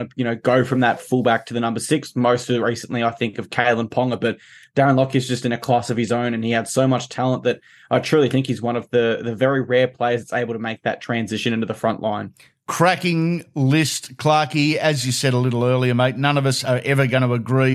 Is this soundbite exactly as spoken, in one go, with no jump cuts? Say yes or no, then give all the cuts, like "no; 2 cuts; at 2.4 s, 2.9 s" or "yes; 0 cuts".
yes; 0 cuts